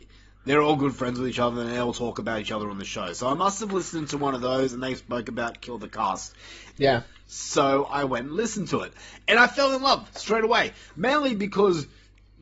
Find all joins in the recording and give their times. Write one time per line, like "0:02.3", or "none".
0:06.7